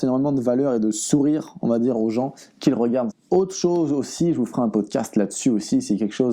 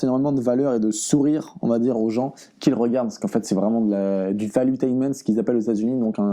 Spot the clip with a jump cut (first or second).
first